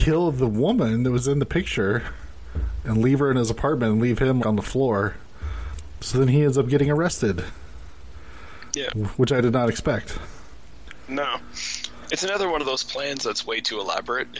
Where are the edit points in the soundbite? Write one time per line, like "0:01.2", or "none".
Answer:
0:04.4